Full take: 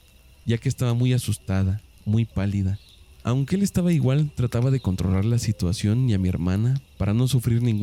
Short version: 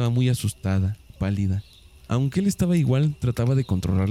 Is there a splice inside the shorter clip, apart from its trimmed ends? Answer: yes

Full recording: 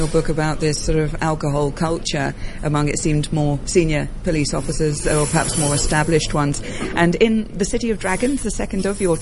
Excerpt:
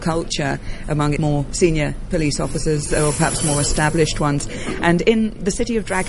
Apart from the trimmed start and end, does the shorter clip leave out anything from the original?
yes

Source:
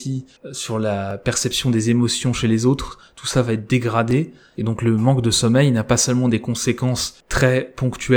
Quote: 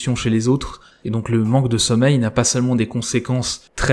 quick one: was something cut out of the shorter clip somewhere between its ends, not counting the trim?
yes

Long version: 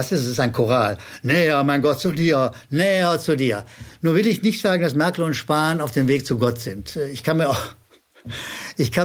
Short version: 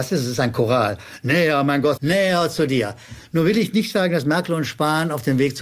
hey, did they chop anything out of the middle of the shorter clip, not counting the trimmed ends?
yes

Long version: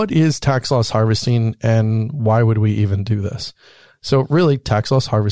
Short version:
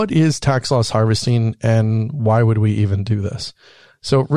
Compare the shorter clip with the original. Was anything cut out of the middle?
no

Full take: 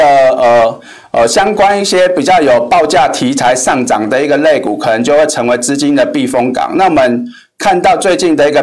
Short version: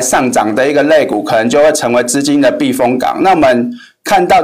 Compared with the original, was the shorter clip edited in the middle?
no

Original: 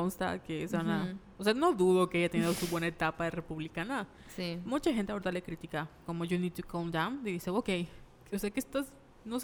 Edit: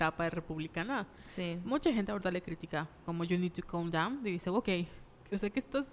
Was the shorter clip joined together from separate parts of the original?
no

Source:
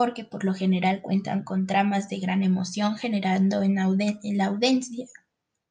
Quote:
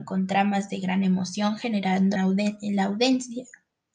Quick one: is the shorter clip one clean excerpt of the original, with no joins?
no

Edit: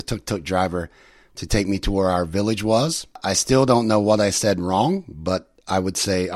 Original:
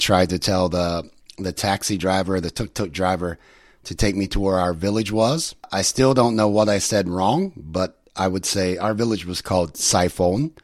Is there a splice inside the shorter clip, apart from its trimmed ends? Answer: no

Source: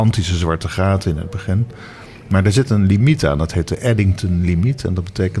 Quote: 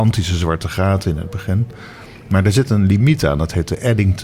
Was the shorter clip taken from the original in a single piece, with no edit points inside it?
yes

